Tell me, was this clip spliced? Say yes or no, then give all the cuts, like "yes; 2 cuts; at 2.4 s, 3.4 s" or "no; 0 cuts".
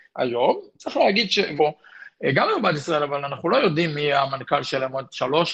yes; 1 cut; at 1.6 s